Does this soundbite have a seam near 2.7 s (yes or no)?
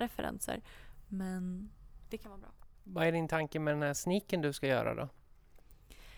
yes